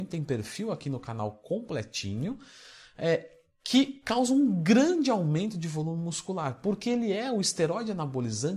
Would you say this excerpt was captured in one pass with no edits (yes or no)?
yes